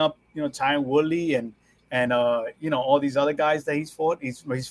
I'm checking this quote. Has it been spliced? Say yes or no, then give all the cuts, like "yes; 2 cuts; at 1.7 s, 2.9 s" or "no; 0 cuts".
no; 0 cuts